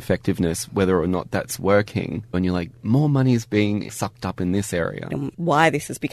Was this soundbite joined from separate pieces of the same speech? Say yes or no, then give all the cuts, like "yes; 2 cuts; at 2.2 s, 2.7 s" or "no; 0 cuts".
yes; 2 cuts; at 2.3 s, 5.1 s